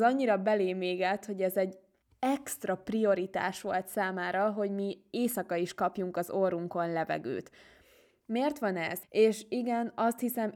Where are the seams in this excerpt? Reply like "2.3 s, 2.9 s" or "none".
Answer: 9.0 s